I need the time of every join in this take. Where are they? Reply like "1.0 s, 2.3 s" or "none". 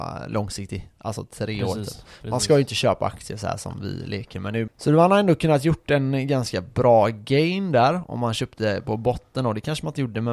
4.7 s